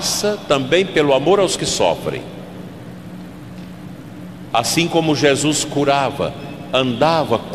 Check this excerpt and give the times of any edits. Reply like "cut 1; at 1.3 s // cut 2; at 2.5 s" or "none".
cut 1; at 4.5 s